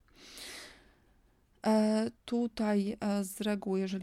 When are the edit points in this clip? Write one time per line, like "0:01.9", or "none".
0:02.2